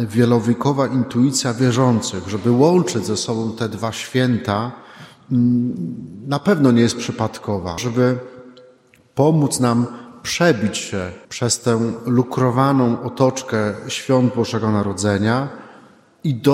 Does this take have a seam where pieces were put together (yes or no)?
yes